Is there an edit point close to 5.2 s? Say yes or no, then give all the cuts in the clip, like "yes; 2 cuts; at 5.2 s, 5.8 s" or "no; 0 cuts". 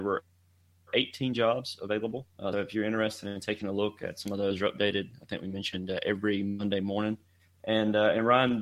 no; 1 cut; at 2.5 s